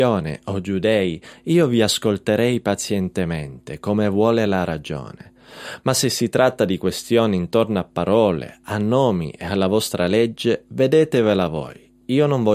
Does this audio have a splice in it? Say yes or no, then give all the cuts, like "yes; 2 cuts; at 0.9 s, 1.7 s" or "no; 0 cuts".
no; 0 cuts